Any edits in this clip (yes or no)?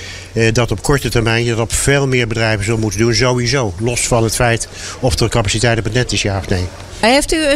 no